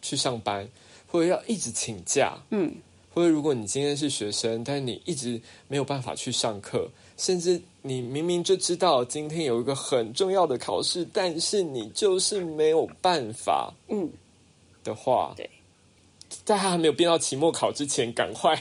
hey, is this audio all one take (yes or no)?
yes